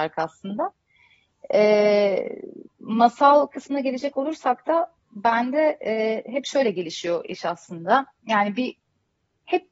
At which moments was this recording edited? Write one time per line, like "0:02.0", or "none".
none

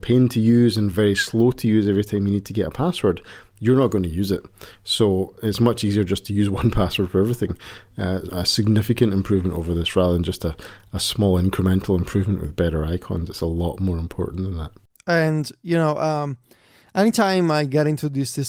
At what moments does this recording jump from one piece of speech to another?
0:08.3
0:14.9

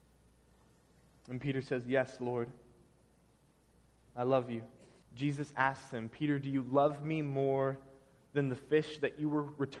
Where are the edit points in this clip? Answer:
0:05.0

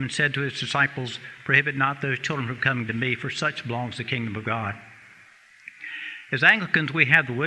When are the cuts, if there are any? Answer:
none

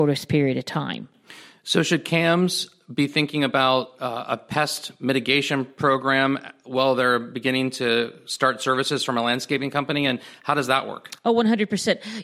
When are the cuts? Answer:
none

